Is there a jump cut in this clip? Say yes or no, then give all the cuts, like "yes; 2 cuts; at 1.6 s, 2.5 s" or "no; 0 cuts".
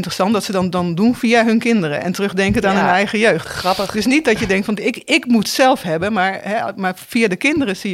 no; 0 cuts